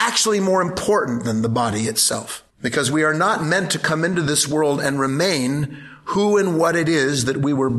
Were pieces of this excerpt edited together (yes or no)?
yes